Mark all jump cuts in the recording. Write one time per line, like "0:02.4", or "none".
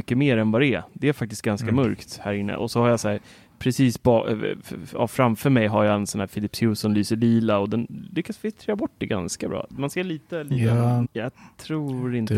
0:11.0